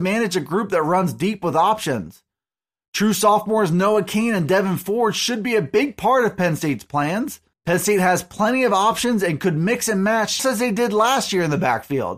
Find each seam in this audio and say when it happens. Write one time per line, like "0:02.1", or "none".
0:07.5
0:10.4